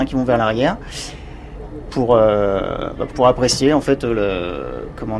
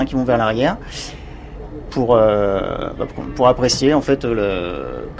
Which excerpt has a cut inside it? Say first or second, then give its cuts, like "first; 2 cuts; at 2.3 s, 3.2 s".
first; 1 cut; at 3.1 s